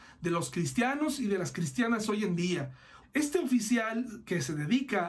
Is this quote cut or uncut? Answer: cut